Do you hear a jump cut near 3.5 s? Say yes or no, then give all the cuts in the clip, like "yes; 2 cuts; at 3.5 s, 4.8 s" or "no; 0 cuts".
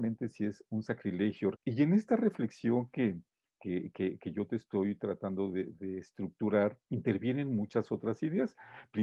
no; 2 cuts; at 1.5 s, 6.8 s